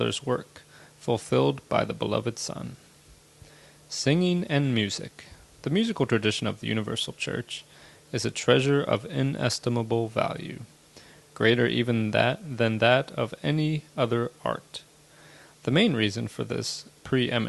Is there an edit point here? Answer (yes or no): no